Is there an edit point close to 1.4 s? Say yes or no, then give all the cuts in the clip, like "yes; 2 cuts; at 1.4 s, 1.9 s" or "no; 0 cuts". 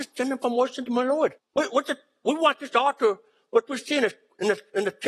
yes; 1 cut; at 1.4 s